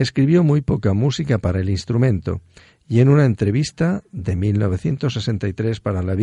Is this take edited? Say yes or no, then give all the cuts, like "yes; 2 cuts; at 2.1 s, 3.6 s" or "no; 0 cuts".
no; 0 cuts